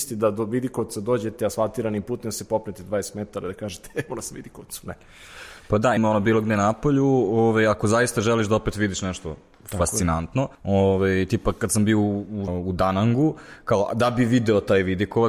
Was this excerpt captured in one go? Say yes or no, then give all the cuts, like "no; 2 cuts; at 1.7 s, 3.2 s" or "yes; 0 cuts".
no; 3 cuts; at 6.0 s, 10.6 s, 12.5 s